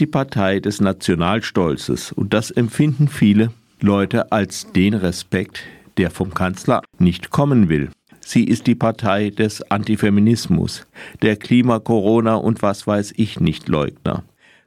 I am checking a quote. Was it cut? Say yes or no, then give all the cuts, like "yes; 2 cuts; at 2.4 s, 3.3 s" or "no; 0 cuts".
yes; 2 cuts; at 6.9 s, 8.1 s